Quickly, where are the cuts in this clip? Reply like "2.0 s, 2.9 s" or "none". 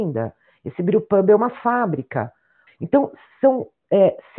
2.7 s